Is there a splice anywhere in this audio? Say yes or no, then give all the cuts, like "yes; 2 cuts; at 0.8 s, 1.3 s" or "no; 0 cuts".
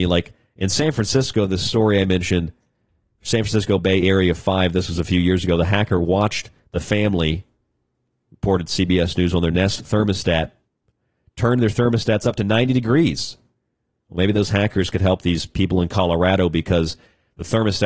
no; 0 cuts